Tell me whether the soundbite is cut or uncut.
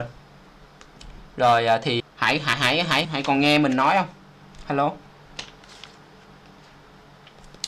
cut